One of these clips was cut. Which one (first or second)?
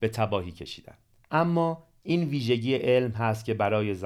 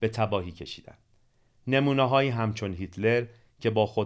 first